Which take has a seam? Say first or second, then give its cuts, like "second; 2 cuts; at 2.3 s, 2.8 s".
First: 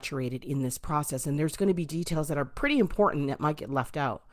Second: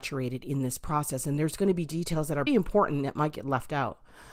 second; 1 cut; at 2.5 s